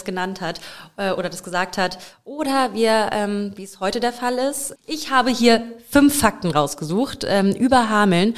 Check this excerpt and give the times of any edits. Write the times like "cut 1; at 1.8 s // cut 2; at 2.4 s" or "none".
cut 1; at 4.8 s

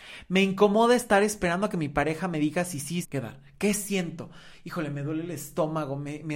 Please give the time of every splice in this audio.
cut 1; at 3.0 s

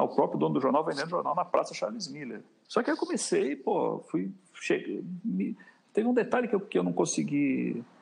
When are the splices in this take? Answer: cut 1; at 2.6 s

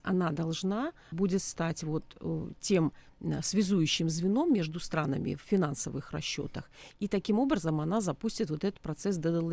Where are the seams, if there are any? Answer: cut 1; at 1.1 s

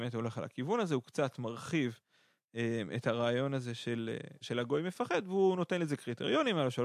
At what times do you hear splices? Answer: cut 1; at 4.4 s

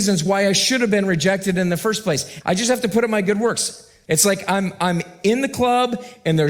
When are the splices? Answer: cut 1; at 2.4 s // cut 2; at 4.0 s

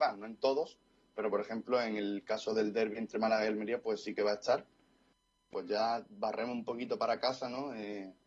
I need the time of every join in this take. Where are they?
cut 1; at 5.5 s

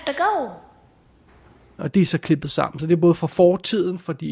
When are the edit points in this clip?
cut 1; at 1.8 s

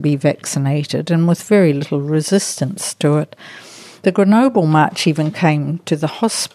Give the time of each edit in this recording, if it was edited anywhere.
cut 1; at 4.0 s

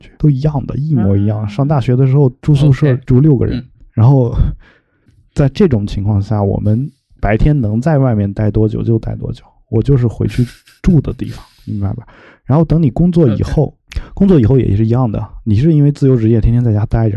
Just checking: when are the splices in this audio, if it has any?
cut 1; at 3.1 s

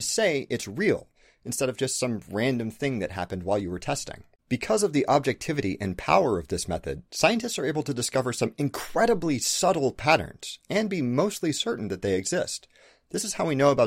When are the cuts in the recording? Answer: none

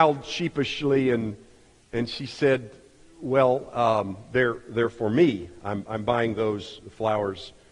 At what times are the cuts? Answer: none

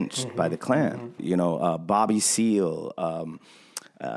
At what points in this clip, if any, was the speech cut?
cut 1; at 1.2 s

